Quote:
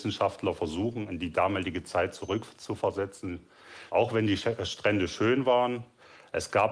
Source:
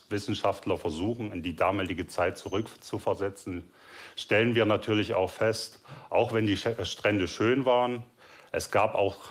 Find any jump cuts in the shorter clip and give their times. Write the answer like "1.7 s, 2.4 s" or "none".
3.9 s